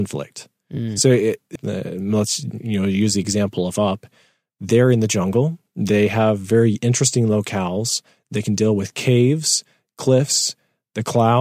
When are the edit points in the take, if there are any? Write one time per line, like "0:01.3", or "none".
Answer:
0:01.6

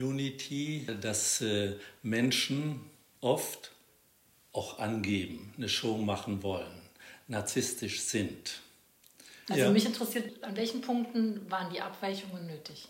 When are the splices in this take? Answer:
0:09.5

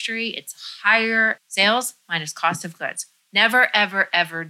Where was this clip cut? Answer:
0:01.4
0:03.2

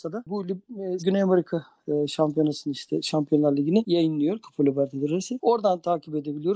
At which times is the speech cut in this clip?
0:01.0

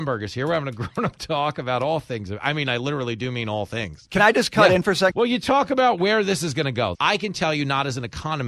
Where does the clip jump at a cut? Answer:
0:05.1
0:06.9

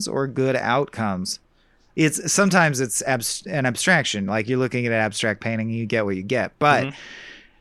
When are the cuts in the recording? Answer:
0:01.9

